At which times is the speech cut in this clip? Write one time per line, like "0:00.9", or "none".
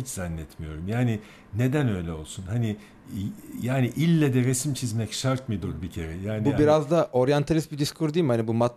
none